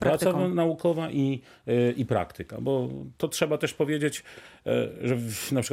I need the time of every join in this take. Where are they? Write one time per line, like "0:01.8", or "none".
none